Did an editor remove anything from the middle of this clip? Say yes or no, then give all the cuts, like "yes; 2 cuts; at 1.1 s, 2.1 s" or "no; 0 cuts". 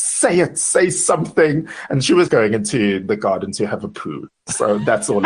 yes; 1 cut; at 2.3 s